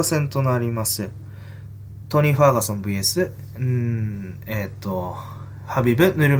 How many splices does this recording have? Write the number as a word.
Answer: zero